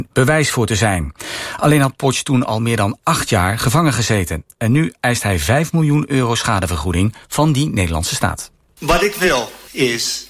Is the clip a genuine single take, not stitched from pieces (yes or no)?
yes